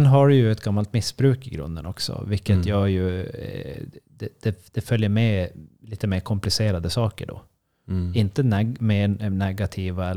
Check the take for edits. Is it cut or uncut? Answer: uncut